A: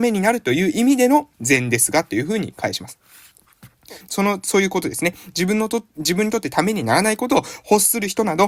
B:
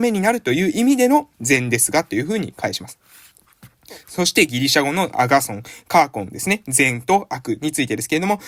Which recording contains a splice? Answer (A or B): A